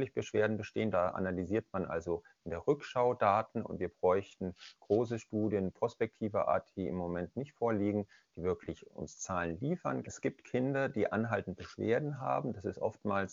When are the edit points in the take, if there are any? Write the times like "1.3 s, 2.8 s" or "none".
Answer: 0.9 s, 10.0 s